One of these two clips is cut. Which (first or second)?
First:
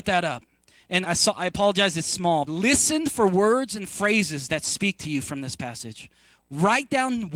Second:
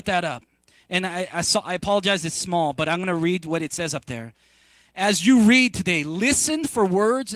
first